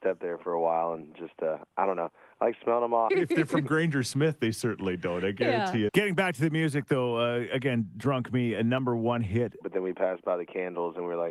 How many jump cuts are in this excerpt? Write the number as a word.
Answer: three